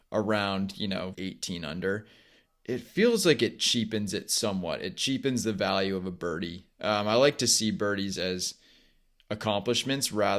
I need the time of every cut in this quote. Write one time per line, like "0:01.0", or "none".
0:01.1